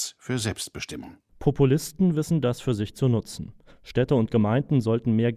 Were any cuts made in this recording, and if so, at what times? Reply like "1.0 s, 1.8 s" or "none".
3.7 s